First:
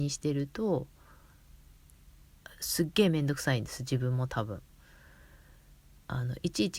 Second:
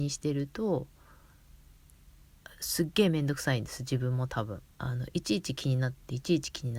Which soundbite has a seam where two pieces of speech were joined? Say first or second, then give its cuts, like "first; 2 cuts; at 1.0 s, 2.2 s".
second; 1 cut; at 4.7 s